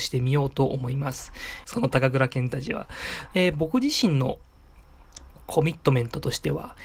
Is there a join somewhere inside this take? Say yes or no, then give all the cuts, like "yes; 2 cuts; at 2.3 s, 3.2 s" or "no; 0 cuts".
yes; 2 cuts; at 1.6 s, 3.3 s